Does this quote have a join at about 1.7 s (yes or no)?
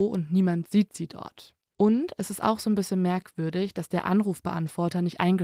yes